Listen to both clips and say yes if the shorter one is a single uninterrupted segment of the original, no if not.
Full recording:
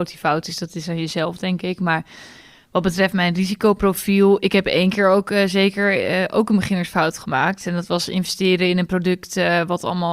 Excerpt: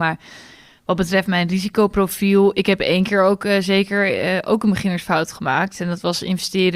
yes